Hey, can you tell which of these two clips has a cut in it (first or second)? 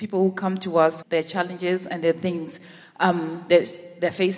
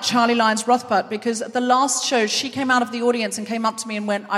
first